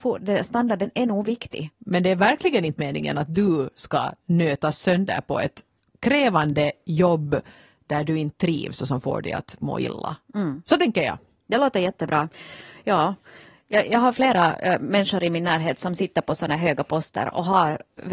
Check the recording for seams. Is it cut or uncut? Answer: cut